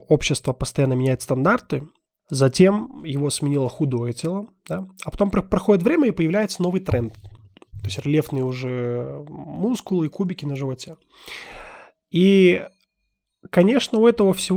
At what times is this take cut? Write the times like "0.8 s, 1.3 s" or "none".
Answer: 2.2 s